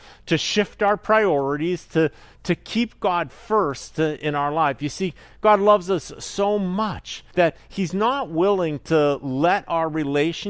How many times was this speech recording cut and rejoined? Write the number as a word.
one